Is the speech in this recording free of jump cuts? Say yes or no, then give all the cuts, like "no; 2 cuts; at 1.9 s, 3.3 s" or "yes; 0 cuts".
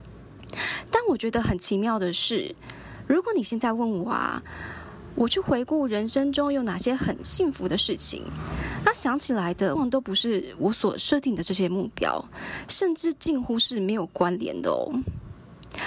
no; 1 cut; at 9.8 s